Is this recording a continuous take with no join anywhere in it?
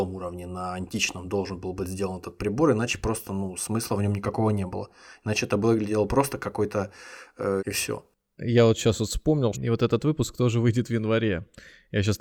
no; 2 cuts; at 7.6 s, 9.5 s

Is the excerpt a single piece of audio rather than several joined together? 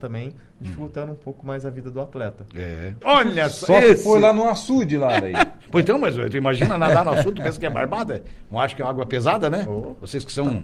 no; 1 cut; at 3.0 s

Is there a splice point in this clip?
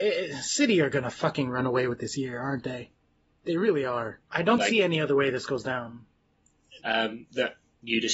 yes; 2 cuts; at 4.2 s, 6.8 s

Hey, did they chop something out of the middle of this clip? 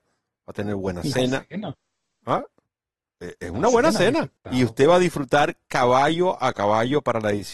yes; 1 cut; at 4.4 s

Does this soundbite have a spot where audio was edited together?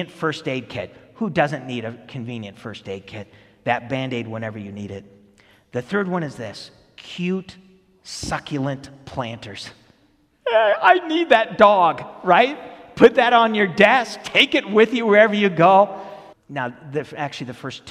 yes; 1 cut; at 16.3 s

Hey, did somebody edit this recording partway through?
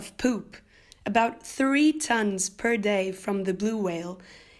no; 0 cuts

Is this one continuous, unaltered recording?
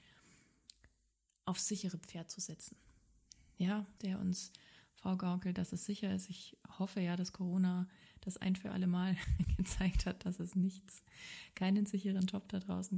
no; 1 cut; at 4.0 s

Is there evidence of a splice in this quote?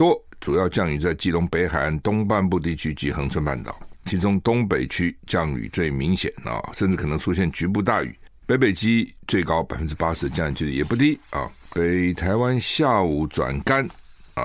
yes; 1 cut; at 8.4 s

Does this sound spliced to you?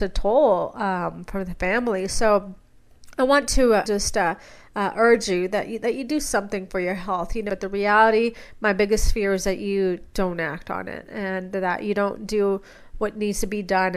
yes; 2 cuts; at 3.9 s, 7.5 s

